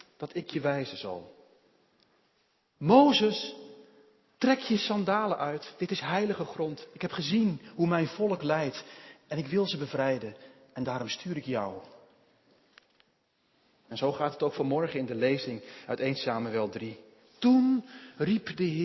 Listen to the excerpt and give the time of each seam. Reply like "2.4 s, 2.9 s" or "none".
none